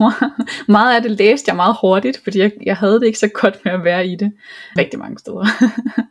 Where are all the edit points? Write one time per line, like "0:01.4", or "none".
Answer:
0:04.8